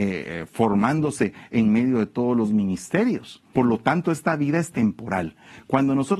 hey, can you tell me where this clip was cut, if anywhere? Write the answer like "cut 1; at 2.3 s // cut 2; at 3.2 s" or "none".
cut 1; at 3.5 s